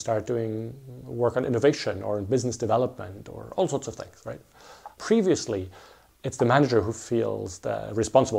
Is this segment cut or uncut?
cut